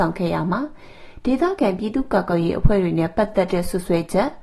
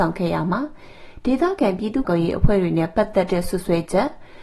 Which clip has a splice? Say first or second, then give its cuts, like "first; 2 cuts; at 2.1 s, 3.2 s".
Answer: second; 1 cut; at 2.0 s